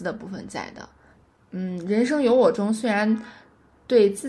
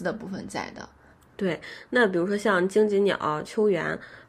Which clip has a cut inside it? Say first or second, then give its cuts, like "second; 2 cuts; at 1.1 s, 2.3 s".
second; 1 cut; at 1.1 s